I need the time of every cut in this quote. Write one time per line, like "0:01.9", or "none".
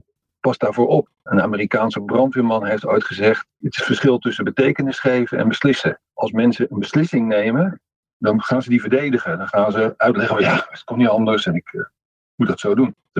none